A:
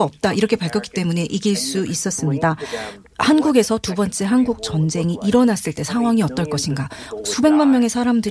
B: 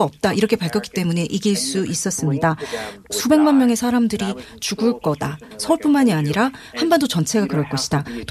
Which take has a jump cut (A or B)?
B